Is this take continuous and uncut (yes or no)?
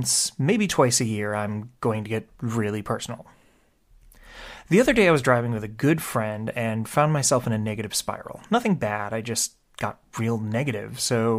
yes